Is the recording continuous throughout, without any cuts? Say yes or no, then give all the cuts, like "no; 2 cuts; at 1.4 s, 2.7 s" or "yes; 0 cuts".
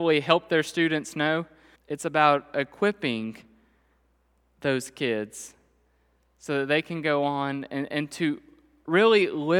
no; 1 cut; at 1.8 s